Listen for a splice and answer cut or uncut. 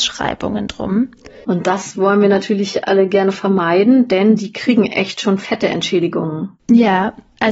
cut